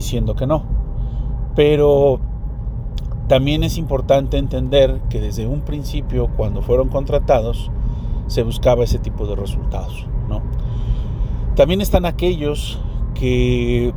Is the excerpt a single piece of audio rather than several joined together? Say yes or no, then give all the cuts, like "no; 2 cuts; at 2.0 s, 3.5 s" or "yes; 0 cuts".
yes; 0 cuts